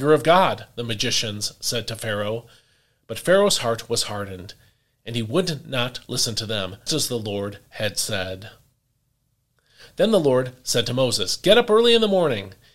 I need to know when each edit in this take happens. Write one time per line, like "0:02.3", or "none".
0:06.9